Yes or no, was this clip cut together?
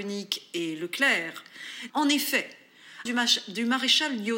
yes